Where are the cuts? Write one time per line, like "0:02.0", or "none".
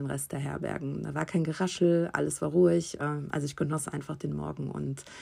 0:03.0

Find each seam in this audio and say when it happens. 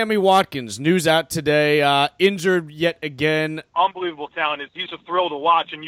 0:03.7
0:04.9

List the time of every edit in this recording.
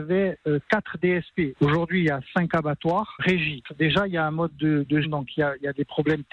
0:01.6
0:03.2
0:05.0

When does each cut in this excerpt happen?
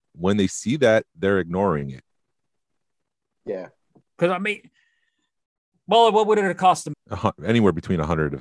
0:04.0
0:06.9

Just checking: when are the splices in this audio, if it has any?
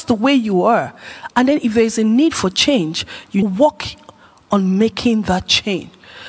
0:03.4

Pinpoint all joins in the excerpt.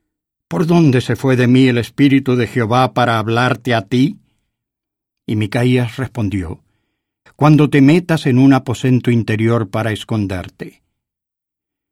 0:07.3

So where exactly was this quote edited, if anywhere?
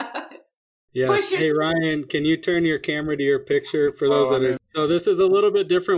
0:04.6

